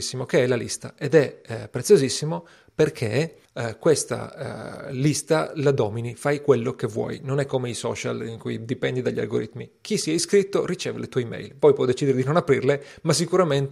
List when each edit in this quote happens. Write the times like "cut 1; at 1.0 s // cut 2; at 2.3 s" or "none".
cut 1; at 3.5 s